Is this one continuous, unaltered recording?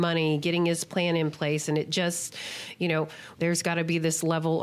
no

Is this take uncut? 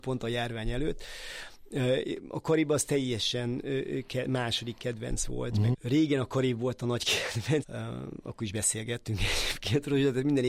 no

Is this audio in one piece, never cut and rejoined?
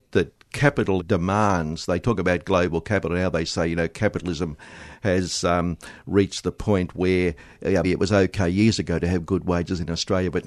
no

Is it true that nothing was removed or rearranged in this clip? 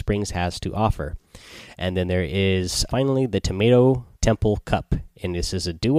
no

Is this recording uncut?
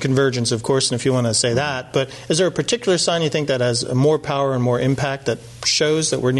yes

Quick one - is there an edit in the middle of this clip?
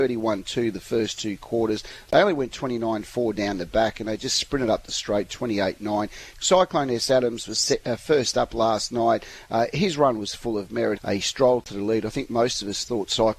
yes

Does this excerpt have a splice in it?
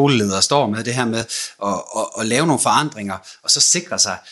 no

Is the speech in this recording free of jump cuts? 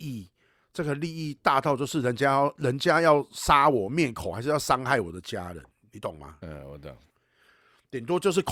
yes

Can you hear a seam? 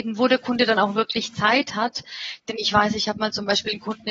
no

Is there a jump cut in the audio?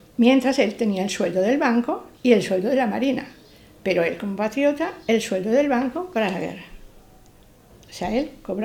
yes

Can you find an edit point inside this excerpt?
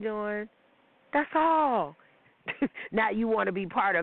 yes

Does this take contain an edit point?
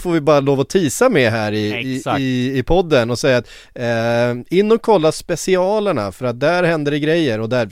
no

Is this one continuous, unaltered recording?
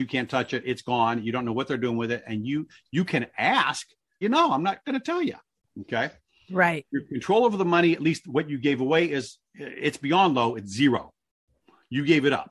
no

